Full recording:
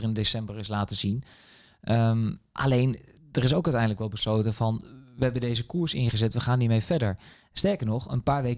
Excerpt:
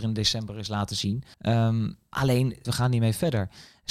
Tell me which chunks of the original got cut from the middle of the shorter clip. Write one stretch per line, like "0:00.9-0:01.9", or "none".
0:01.3-0:01.8
0:03.1-0:06.3